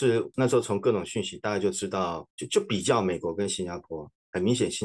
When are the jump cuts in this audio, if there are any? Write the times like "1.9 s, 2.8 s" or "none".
none